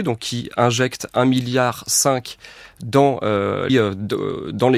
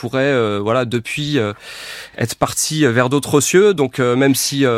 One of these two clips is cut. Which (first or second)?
first